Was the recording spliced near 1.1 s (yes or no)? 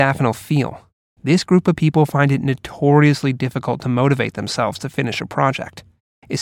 yes